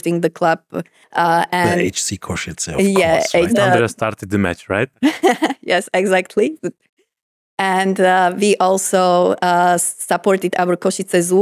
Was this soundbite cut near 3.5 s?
yes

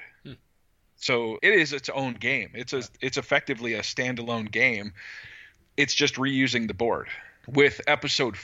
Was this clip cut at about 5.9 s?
no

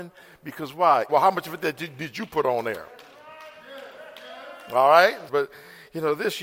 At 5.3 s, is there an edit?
yes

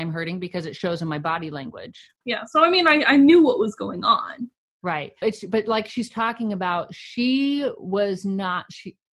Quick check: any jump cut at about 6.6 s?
no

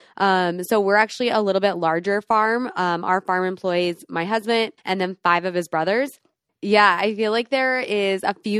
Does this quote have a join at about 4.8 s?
yes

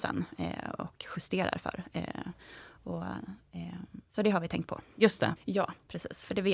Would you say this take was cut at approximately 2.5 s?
no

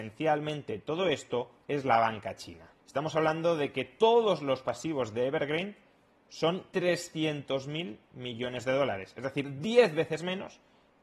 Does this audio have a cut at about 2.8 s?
yes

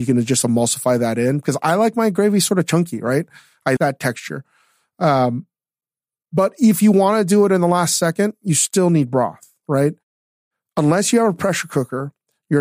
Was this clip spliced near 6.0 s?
no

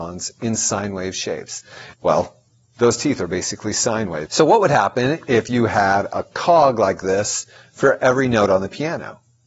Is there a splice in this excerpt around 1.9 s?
yes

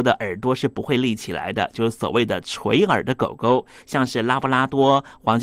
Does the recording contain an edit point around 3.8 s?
no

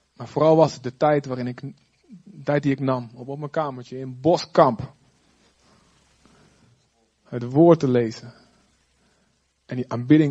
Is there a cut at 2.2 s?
no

